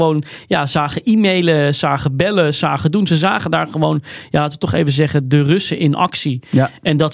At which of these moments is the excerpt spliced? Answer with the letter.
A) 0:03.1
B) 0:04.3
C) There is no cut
C